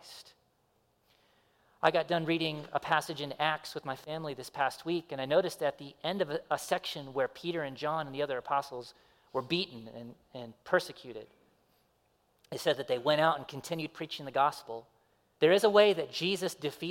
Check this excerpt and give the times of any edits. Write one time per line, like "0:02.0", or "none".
0:15.3